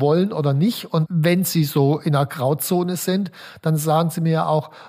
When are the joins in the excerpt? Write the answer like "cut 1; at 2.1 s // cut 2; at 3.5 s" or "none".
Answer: none